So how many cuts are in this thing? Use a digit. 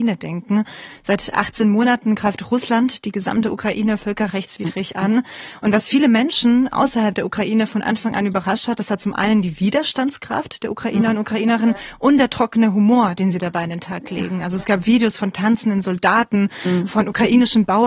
0